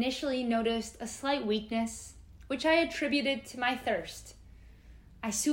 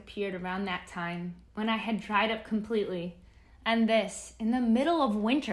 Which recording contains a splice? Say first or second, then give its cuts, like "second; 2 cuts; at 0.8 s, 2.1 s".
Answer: second; 1 cut; at 1.5 s